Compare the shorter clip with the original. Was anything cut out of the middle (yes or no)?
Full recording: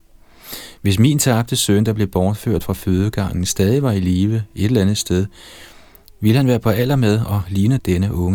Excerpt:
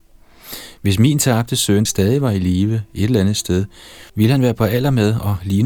yes